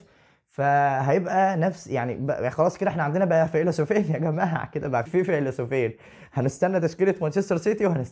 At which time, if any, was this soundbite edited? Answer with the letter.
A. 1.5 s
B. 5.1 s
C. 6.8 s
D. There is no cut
B